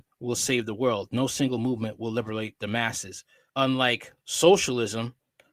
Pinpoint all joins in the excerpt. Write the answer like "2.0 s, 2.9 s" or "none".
3.5 s